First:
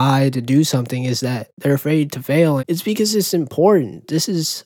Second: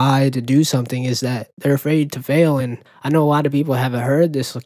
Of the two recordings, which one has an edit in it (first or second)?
first